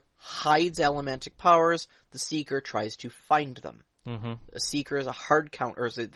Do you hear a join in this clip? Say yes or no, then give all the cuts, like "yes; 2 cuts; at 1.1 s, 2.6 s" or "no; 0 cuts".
no; 0 cuts